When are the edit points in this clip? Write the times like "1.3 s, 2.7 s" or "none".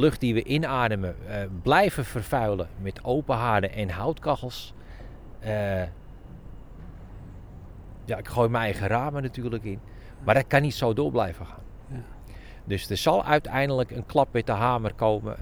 none